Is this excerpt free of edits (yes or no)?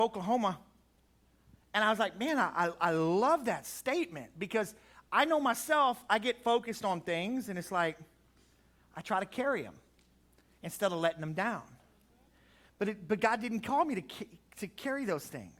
yes